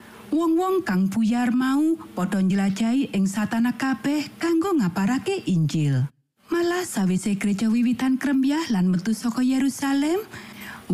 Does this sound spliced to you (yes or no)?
no